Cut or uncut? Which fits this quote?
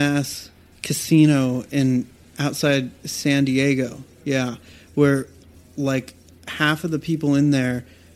uncut